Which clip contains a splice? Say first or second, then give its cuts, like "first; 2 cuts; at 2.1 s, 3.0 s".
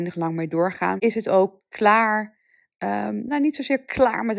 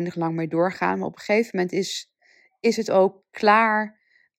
first; 1 cut; at 1.0 s